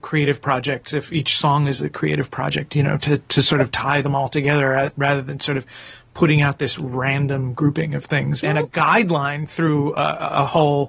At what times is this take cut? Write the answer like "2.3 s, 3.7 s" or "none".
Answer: 8.4 s, 9.5 s